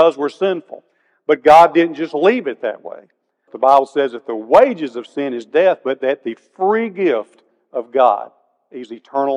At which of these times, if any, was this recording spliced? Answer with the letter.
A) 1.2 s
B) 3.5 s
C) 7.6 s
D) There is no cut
B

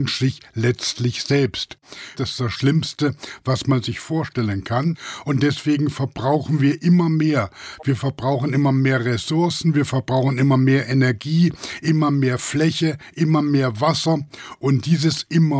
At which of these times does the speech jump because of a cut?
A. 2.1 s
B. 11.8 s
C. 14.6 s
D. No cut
A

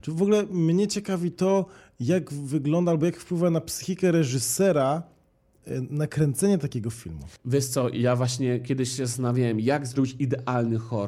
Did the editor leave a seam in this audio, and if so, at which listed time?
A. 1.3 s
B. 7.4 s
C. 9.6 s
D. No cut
B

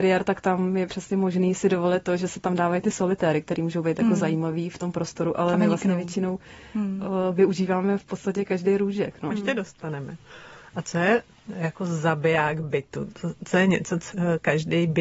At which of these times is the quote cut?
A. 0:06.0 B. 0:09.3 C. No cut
B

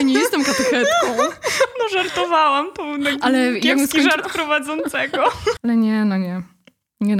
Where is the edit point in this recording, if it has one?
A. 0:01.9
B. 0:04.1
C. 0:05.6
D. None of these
C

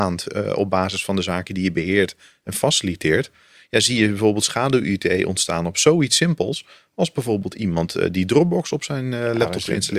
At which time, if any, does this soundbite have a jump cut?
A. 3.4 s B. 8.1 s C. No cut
C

